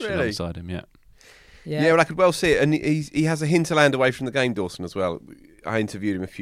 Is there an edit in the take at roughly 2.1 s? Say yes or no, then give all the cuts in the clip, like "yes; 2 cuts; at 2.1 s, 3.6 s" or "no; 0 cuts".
no; 0 cuts